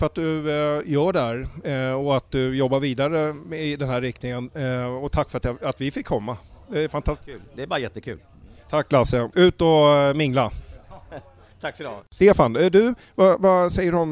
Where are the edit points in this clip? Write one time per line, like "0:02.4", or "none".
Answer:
none